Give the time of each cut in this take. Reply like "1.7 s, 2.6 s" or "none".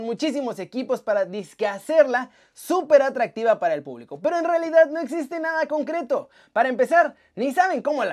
none